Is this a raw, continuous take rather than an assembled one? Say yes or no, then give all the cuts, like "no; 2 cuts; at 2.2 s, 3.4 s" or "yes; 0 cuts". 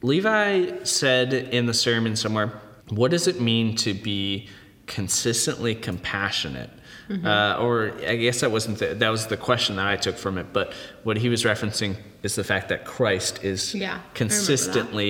no; 1 cut; at 2.8 s